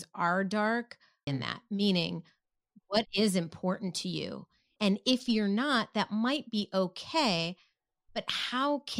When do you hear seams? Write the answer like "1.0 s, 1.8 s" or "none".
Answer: 1.3 s, 4.8 s